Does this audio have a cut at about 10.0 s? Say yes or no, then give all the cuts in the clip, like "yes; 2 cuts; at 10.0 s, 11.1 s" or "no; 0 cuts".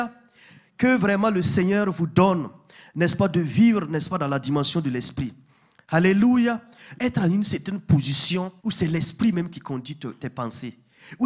no; 2 cuts; at 6.9 s, 8.6 s